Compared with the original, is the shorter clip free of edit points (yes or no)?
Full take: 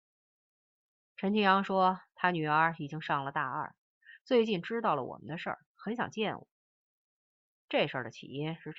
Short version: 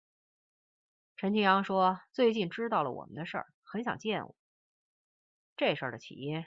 no